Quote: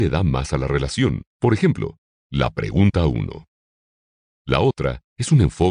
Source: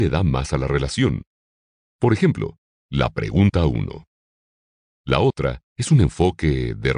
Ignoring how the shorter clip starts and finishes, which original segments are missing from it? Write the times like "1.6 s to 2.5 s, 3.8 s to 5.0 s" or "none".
1.3 s to 1.9 s